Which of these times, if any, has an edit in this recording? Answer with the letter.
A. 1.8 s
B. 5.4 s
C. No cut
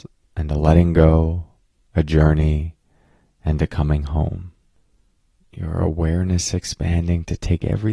B